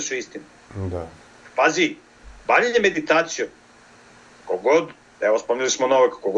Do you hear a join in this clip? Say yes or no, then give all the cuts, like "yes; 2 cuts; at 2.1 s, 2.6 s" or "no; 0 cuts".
no; 0 cuts